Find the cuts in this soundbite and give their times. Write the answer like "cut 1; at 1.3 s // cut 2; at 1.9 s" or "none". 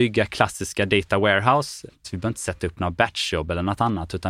cut 1; at 2.0 s

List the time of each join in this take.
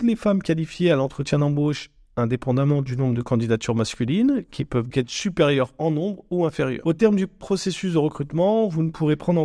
cut 1; at 4.9 s

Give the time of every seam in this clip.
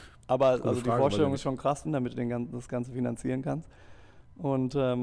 cut 1; at 1.8 s

